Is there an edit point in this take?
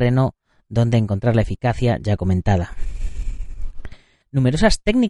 yes; 1 cut; at 4.2 s

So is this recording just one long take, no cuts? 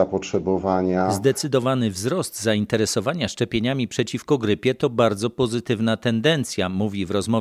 yes; 0 cuts

